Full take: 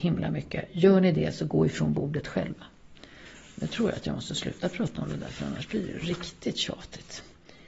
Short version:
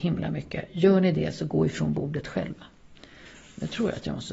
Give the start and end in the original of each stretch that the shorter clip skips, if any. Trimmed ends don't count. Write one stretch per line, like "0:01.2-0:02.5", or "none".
none